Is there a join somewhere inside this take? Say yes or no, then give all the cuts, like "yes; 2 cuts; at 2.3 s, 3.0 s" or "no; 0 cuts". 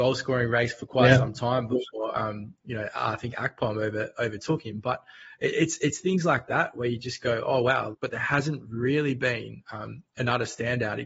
yes; 1 cut; at 7.9 s